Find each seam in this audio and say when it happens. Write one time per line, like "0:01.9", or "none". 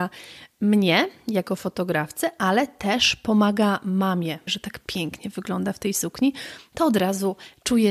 0:04.5